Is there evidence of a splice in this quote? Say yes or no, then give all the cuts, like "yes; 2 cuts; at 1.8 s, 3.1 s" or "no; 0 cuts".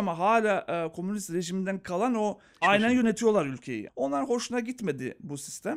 yes; 2 cuts; at 2.6 s, 3.9 s